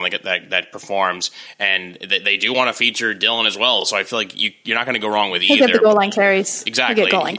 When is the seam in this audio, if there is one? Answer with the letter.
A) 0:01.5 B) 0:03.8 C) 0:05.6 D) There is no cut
D